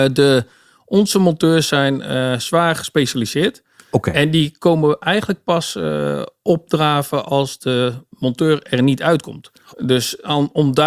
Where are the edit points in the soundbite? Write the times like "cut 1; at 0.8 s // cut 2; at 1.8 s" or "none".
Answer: cut 1; at 9.7 s